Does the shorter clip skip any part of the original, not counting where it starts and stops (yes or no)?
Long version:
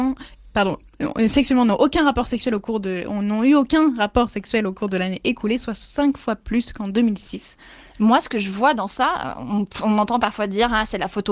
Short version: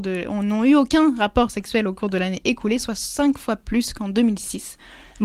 no